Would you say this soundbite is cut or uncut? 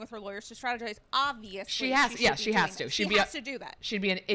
uncut